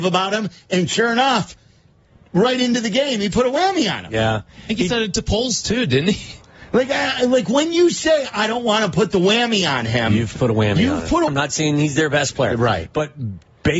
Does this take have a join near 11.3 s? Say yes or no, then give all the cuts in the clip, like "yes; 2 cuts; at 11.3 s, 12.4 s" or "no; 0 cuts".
yes; 1 cut; at 11.3 s